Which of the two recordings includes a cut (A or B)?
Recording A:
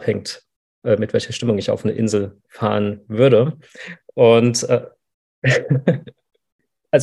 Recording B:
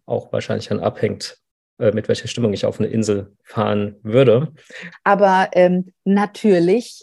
B